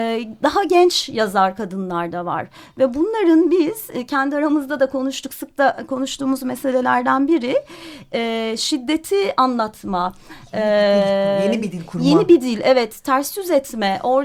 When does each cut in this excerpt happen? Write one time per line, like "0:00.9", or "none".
0:05.3

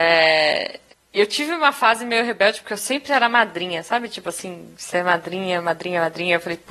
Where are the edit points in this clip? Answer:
none

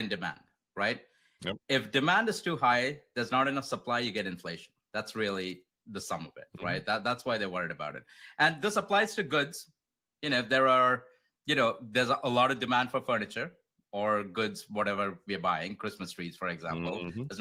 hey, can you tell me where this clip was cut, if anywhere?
none

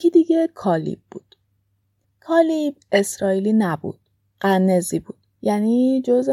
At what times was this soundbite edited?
none

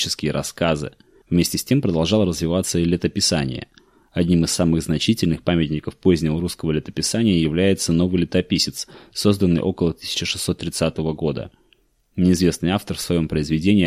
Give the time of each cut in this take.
0:01.2

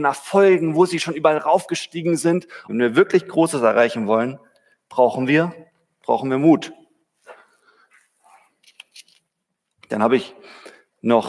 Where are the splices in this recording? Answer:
0:02.7

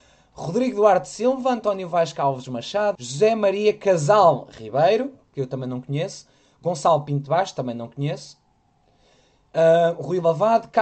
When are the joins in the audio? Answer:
0:03.0

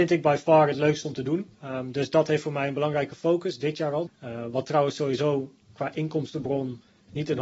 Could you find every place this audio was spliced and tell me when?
0:01.5
0:04.1
0:05.6

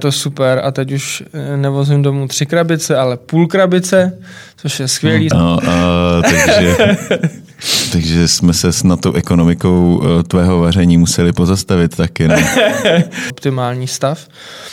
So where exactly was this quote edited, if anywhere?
0:05.3
0:13.3

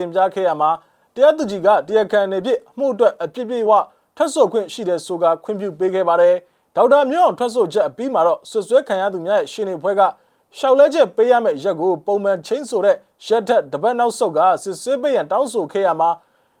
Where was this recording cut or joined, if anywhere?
0:03.7

